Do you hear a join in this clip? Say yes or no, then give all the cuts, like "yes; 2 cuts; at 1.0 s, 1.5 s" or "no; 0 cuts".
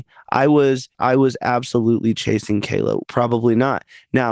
yes; 2 cuts; at 0.9 s, 3.0 s